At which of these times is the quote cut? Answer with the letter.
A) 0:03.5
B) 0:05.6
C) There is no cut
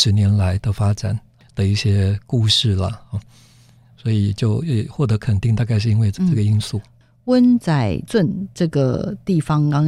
C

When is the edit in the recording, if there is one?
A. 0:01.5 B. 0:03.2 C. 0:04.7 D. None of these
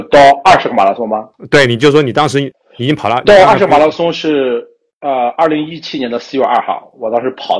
D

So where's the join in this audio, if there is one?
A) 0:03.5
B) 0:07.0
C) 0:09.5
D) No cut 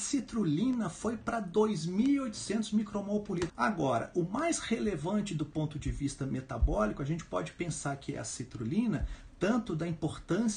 A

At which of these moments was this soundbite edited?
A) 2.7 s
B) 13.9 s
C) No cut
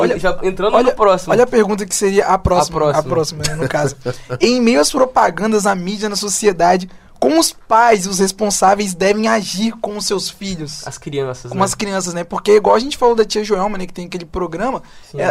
C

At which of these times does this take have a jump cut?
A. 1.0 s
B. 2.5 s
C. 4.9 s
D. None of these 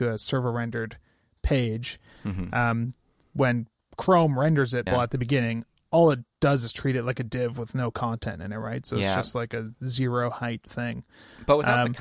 C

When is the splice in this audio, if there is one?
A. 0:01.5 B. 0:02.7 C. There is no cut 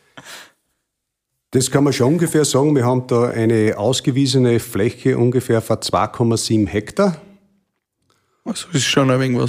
C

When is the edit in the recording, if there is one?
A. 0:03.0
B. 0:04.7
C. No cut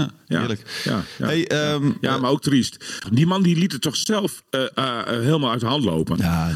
A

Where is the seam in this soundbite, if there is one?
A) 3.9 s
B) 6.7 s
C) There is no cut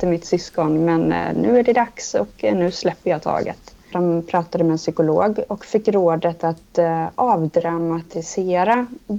A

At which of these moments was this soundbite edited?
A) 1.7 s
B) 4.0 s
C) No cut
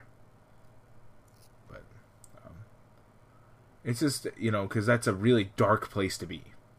A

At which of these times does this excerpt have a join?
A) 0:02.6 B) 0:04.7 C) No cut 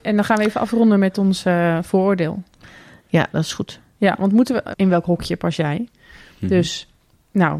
B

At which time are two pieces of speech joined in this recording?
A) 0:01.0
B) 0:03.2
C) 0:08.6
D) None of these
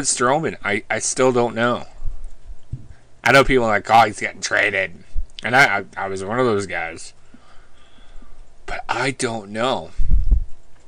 B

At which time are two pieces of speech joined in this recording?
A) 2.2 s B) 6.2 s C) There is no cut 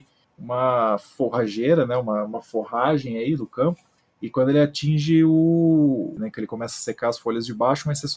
B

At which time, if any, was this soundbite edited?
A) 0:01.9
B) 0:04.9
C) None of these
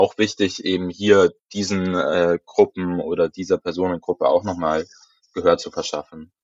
C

